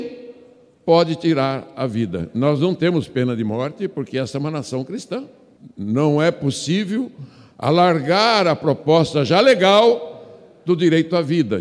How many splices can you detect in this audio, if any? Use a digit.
0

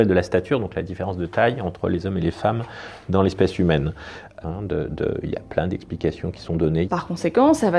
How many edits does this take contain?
2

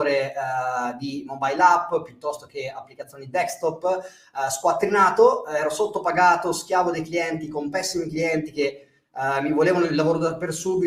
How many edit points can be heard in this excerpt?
0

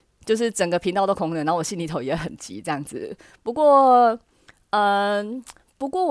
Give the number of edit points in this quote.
1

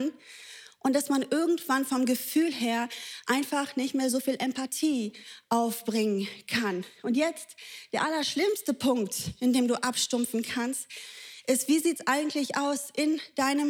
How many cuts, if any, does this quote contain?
0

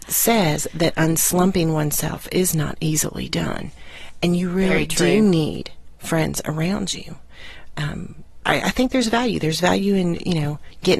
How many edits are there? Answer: 1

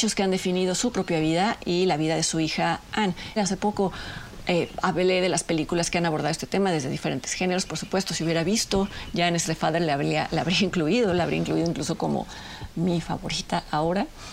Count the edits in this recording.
2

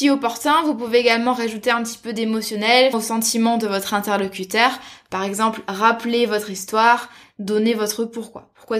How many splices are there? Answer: 1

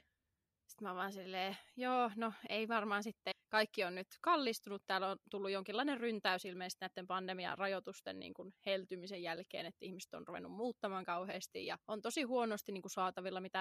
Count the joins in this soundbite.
2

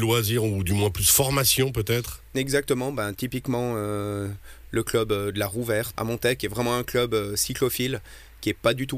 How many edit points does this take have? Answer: 1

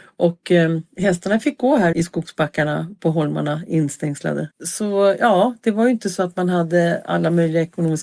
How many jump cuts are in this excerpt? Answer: 2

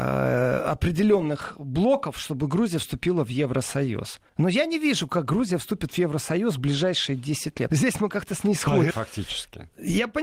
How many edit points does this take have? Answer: 3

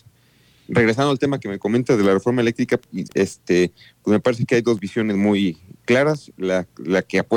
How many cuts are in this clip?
1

